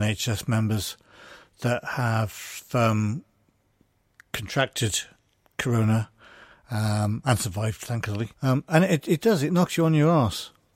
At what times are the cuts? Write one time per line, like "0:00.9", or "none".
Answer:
0:08.3